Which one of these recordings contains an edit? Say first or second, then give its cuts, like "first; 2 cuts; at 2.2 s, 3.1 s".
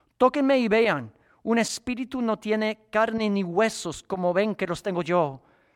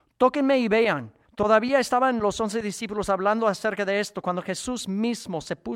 second; 1 cut; at 1.2 s